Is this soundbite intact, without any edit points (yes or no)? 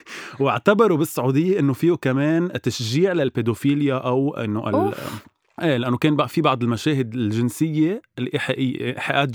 yes